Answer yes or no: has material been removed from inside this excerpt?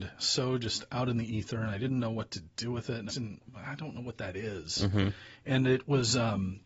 yes